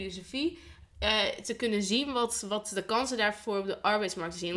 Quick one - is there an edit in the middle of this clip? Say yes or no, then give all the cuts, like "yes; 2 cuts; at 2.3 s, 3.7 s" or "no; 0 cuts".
no; 0 cuts